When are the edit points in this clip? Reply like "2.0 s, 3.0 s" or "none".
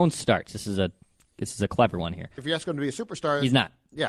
2.4 s

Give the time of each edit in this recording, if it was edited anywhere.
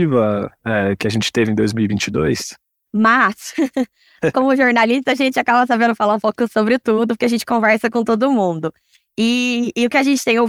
2.9 s

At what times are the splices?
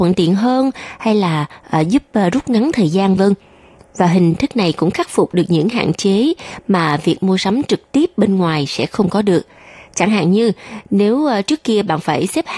3.2 s

